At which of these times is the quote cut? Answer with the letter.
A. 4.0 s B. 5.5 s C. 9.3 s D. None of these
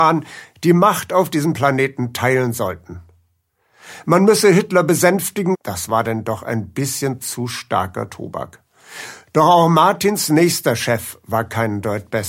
B